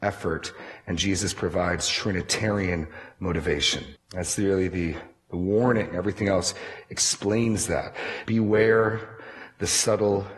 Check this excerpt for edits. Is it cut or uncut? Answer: cut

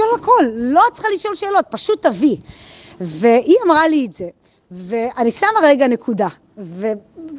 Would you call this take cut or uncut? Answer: uncut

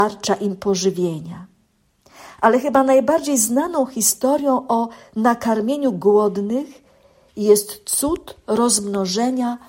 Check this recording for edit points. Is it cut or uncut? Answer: uncut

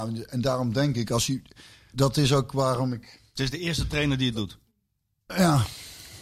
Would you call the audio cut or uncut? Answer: cut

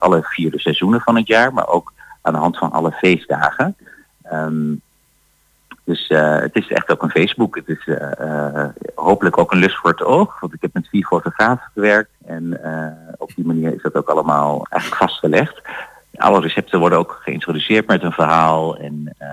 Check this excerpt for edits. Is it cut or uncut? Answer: cut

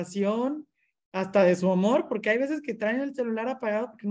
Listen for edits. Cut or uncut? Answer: uncut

